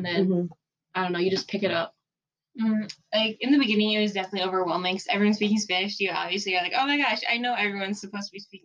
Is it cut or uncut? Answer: uncut